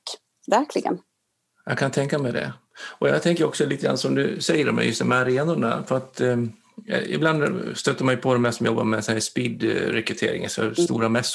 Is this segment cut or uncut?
uncut